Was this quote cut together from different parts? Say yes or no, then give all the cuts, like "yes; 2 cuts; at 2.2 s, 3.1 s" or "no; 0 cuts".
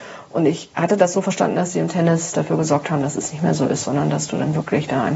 no; 0 cuts